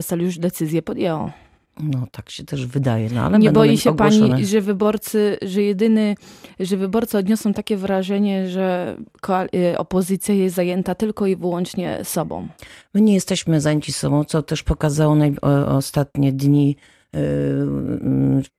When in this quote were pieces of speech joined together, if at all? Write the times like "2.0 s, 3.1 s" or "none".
none